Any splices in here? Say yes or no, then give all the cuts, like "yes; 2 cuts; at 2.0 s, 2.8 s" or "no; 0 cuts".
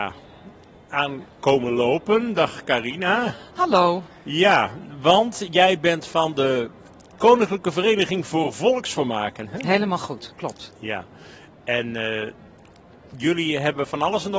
no; 0 cuts